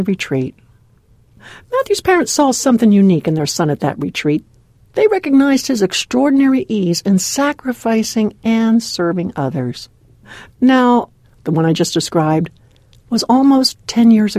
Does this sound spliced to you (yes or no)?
yes